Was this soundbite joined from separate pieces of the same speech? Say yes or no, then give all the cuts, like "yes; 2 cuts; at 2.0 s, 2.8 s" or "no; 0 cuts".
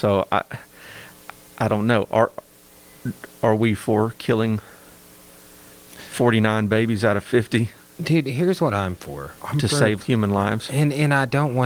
yes; 1 cut; at 9.4 s